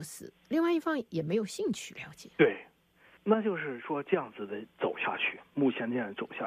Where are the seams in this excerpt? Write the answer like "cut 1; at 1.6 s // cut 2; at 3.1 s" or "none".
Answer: cut 1; at 2.3 s